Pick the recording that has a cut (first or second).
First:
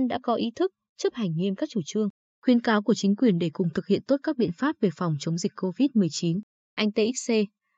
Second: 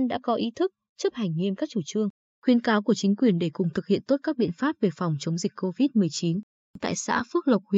first